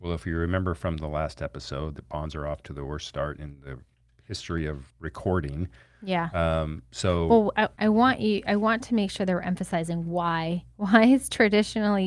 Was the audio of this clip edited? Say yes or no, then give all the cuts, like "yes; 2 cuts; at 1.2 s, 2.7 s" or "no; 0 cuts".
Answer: yes; 2 cuts; at 4.9 s, 7.8 s